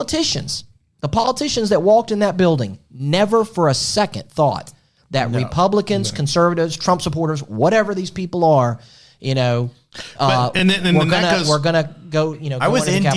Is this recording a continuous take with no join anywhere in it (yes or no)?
yes